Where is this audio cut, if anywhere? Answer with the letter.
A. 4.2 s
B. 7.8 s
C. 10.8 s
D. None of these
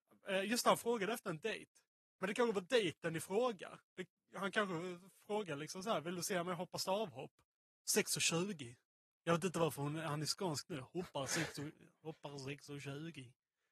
B